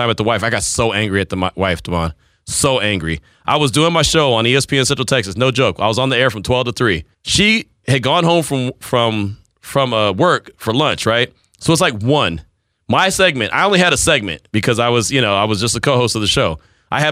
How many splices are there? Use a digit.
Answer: 1